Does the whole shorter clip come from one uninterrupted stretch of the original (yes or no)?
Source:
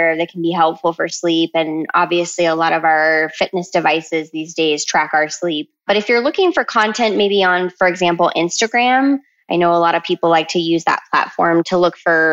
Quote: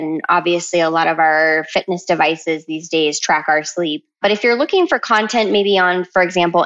yes